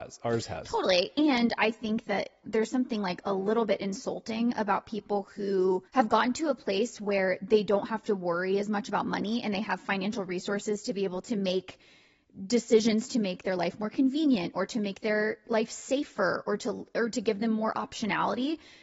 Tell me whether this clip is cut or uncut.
cut